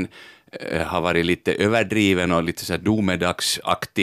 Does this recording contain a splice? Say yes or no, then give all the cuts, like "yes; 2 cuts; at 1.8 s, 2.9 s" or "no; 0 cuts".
no; 0 cuts